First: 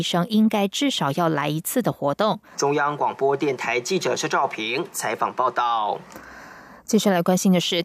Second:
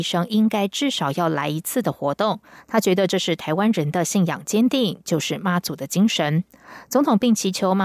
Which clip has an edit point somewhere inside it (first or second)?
first